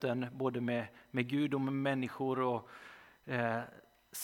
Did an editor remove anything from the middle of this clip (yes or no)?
no